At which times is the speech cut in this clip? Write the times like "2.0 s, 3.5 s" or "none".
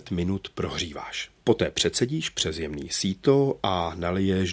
1.4 s